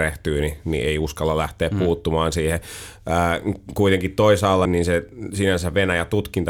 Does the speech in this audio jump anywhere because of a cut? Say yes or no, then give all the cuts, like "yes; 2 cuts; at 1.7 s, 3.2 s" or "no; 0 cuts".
yes; 1 cut; at 4.6 s